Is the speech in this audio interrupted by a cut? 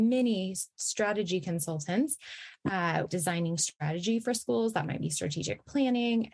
yes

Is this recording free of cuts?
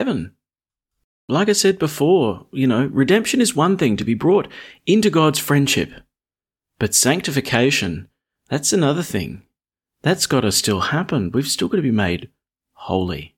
yes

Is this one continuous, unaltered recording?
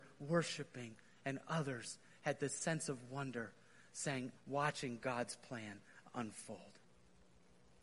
no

